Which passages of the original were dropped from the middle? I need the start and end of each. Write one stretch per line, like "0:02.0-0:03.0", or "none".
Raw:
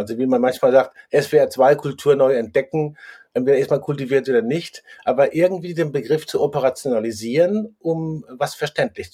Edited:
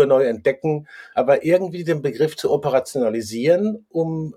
0:03.2-0:05.0